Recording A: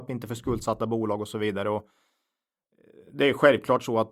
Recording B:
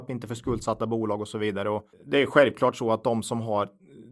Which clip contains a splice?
B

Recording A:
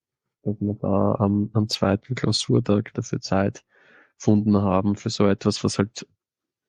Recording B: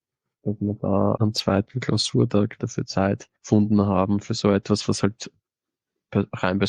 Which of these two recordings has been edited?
B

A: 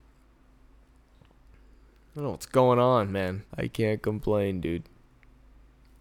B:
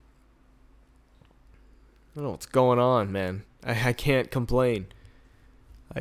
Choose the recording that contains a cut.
A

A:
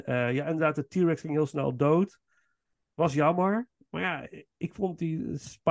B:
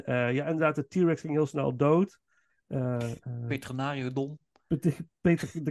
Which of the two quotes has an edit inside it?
B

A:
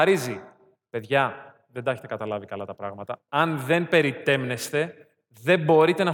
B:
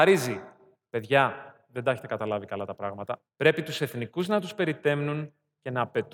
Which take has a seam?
B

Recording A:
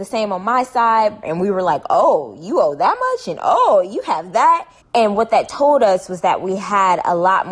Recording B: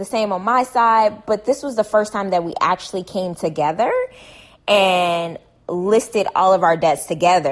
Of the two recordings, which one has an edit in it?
A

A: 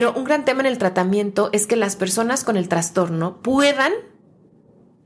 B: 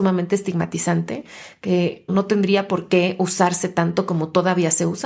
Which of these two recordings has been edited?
B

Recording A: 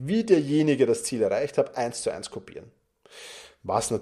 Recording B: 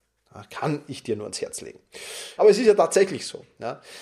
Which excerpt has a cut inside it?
B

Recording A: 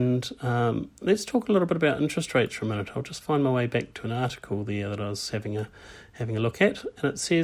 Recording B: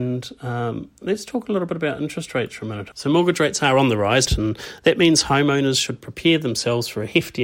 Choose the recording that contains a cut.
B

